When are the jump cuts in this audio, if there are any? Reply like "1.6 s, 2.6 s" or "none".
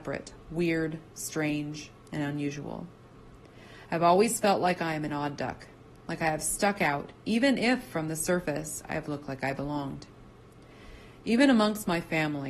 none

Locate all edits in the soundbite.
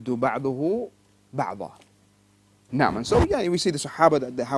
2.7 s

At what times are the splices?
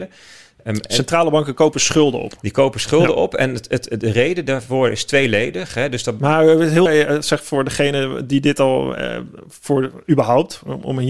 6.9 s

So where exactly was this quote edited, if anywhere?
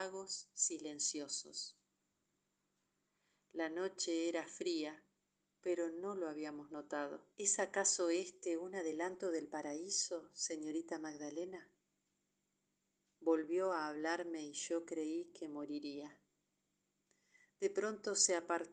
7.3 s

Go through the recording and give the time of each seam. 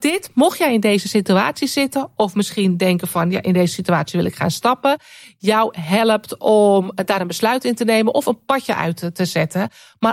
none

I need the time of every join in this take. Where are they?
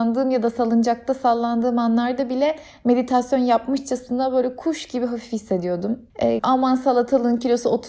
6.4 s

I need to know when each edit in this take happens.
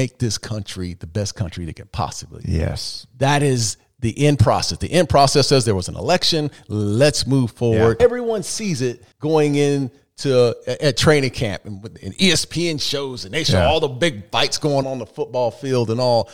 8.0 s, 9.1 s, 14.8 s

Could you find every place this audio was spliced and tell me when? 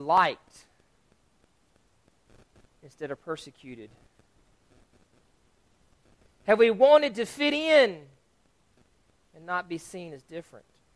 none

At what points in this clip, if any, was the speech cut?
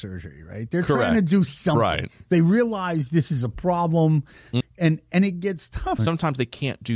4.6 s, 6.0 s

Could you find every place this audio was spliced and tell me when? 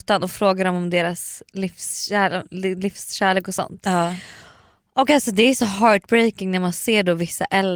none

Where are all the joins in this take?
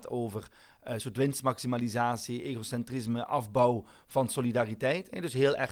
none

